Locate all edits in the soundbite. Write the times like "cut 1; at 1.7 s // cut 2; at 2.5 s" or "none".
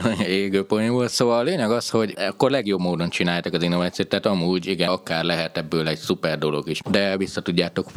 cut 1; at 4.9 s // cut 2; at 6.8 s